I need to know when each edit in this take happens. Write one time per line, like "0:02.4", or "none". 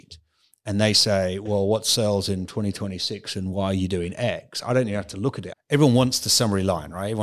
0:05.5

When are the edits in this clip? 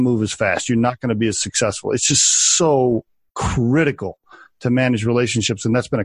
none

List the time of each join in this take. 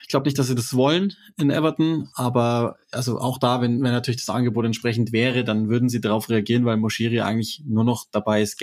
none

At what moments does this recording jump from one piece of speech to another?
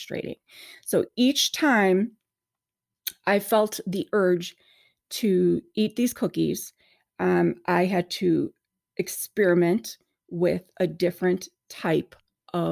none

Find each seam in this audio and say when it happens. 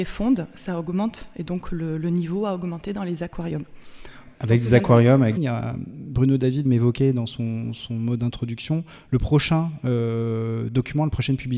0:04.3
0:05.4
0:06.6

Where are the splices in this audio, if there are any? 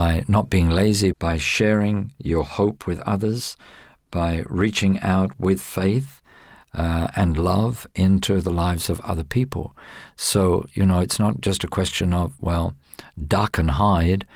0:01.1

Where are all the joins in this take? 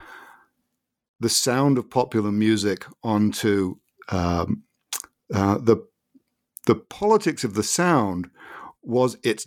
0:05.1

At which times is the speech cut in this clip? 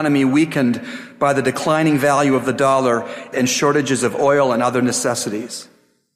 0:03.3

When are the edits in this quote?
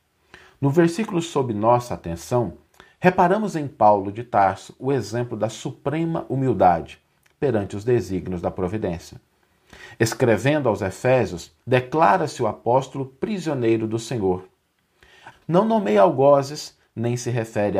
0:11.6
0:15.3

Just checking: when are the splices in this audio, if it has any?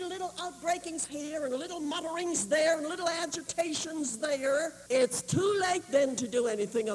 0:04.9

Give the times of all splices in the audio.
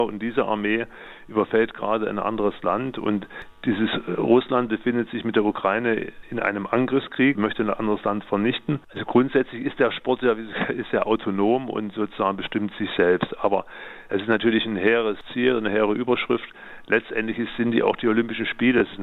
0:07.3
0:08.8

